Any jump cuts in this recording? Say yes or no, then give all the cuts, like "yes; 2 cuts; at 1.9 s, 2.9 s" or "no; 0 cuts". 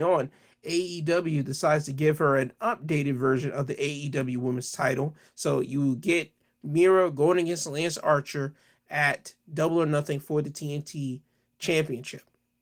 yes; 1 cut; at 5.3 s